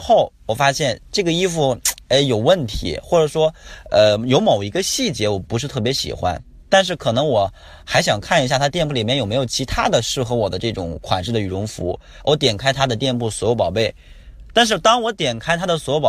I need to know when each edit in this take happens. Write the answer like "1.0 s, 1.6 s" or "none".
none